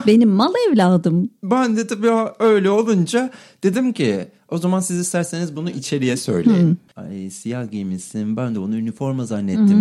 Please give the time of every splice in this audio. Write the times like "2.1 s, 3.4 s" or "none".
6.9 s

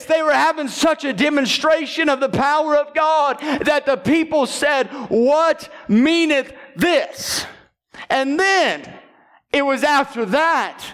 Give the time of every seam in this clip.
none

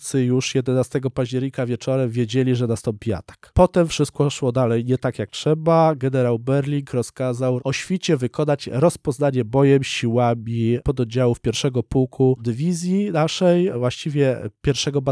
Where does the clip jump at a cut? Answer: none

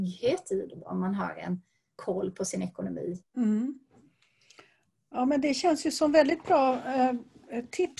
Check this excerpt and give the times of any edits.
3.2 s

